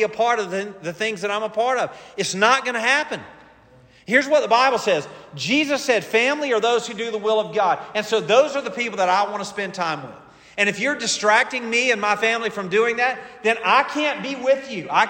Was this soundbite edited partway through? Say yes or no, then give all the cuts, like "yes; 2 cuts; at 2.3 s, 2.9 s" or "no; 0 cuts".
no; 0 cuts